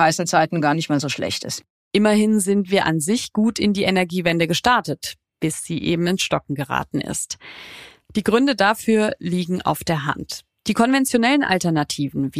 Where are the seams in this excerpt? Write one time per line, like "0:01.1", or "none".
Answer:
none